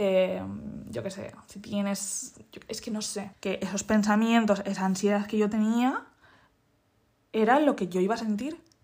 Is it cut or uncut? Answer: cut